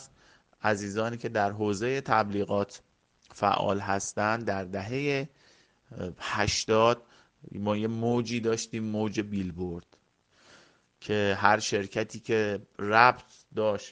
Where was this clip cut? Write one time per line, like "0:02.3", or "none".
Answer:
none